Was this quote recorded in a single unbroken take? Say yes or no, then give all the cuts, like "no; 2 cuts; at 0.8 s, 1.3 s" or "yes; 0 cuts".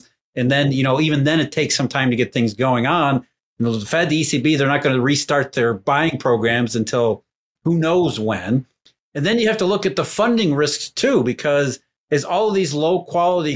yes; 0 cuts